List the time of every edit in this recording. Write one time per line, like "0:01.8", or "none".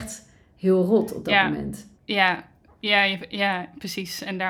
0:01.9